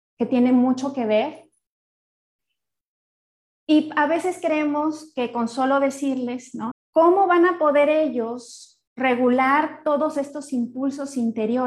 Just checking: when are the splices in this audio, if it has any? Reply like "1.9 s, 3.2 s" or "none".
6.7 s, 8.9 s